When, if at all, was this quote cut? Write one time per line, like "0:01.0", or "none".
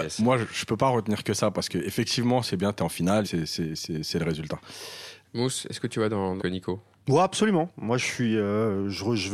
0:03.2
0:05.2
0:06.4

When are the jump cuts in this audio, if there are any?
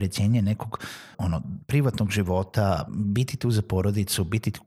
0:01.1
0:02.9

